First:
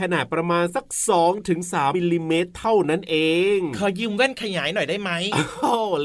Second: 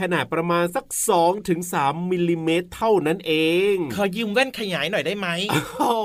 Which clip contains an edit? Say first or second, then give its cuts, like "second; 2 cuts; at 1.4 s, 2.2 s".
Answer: first; 1 cut; at 1.9 s